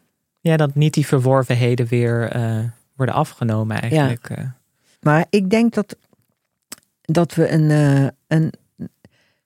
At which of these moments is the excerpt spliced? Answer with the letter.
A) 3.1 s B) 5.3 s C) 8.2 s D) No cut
B